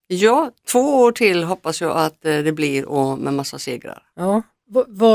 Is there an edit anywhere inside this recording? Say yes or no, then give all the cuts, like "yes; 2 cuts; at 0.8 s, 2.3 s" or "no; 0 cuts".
no; 0 cuts